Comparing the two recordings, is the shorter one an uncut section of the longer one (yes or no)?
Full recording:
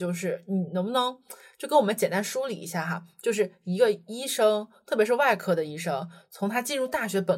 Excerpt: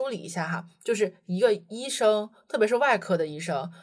yes